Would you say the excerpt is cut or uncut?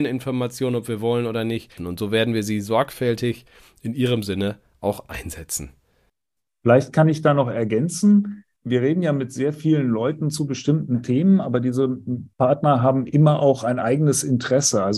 cut